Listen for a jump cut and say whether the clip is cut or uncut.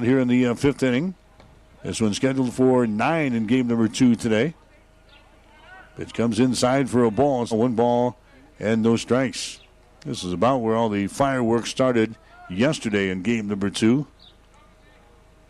cut